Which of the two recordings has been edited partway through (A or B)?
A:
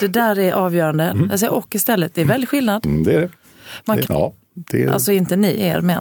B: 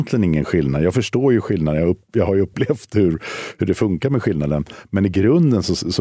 A